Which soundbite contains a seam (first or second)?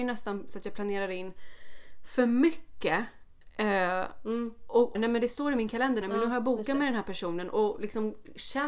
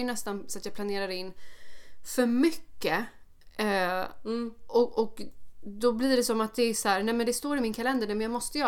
first